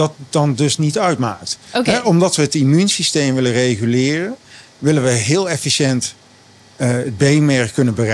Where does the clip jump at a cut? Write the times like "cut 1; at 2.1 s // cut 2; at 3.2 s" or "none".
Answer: none